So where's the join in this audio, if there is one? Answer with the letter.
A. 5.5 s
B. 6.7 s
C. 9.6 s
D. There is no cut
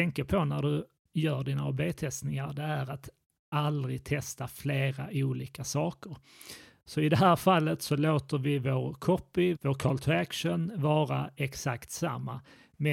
C